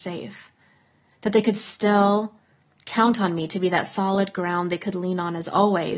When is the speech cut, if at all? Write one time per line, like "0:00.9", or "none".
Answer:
none